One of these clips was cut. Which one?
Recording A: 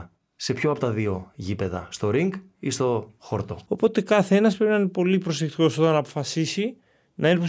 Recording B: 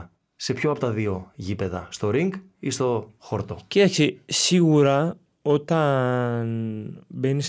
A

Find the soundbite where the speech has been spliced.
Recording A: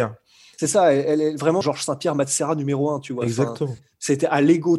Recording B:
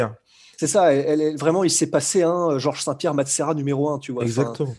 A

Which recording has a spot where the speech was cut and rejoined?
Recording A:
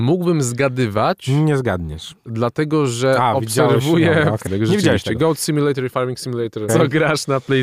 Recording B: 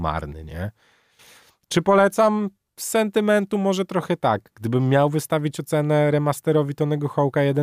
A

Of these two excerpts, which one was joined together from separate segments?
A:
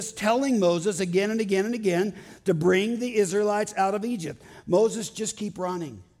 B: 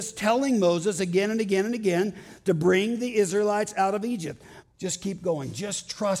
B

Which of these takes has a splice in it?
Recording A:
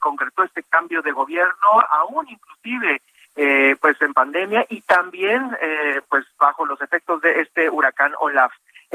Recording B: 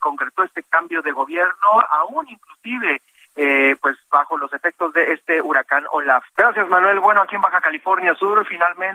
B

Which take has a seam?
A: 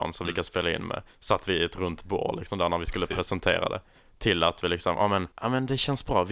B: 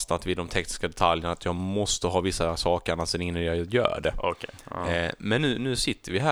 A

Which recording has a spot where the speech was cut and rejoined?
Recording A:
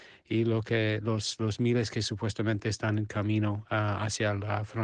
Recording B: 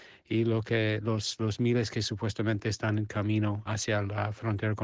B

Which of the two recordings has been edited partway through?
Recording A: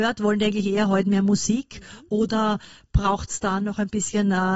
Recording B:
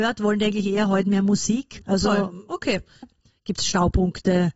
B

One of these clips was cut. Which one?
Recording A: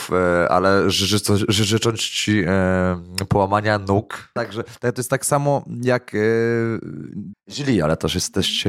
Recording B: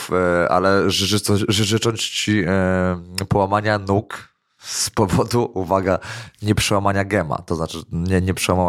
A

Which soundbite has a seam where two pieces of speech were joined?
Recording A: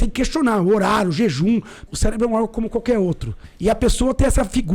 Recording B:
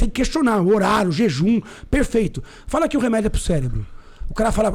A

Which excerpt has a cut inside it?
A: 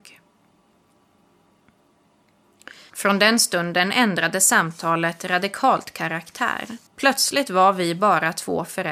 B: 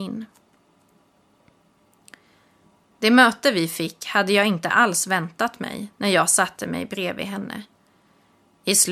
A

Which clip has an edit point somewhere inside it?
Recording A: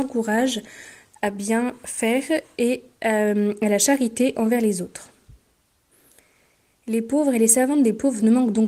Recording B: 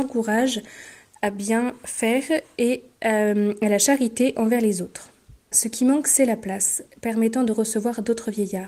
B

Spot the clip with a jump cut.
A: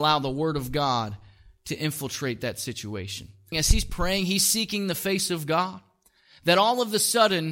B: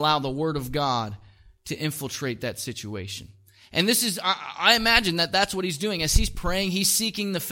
A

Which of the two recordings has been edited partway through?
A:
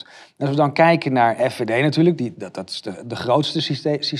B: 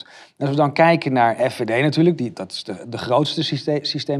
B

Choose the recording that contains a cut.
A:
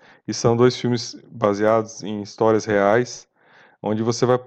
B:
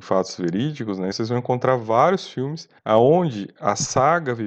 B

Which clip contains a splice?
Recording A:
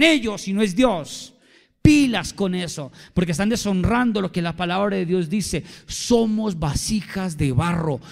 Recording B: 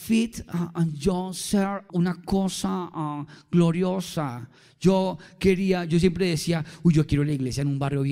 B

